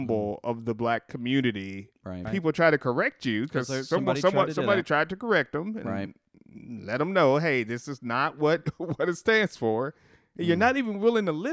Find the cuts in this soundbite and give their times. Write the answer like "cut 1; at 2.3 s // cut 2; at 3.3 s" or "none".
cut 1; at 2.3 s

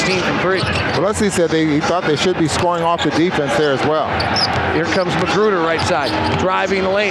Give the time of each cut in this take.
none

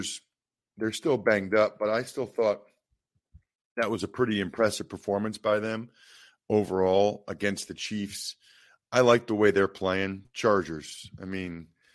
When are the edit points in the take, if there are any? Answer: cut 1; at 10.2 s

